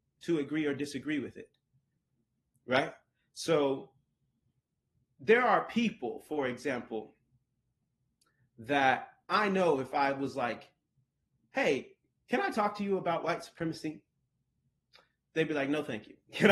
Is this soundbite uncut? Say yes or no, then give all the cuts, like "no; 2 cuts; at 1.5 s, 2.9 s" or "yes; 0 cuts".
yes; 0 cuts